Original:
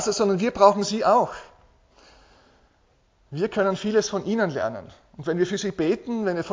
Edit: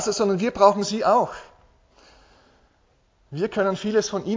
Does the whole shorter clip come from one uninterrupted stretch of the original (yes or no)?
yes